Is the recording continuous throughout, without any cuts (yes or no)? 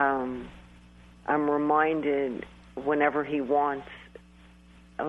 no